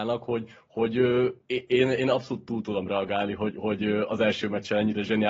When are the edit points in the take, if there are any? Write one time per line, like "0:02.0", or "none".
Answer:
none